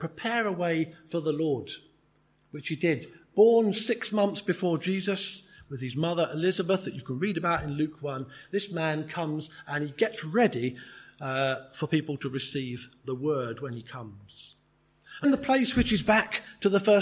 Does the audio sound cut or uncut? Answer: cut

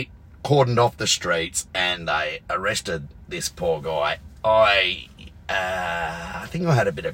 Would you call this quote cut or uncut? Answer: uncut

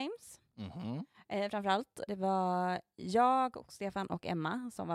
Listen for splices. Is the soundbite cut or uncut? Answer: cut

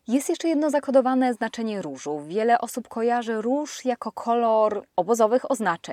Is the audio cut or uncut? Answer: uncut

